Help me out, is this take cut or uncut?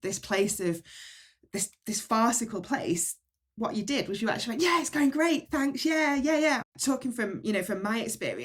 cut